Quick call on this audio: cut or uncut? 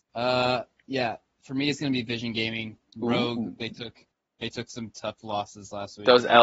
uncut